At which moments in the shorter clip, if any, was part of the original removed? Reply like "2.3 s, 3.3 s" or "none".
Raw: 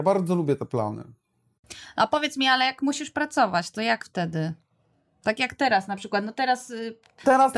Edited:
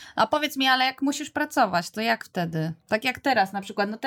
2.8 s